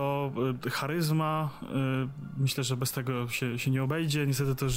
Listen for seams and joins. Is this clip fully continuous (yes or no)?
yes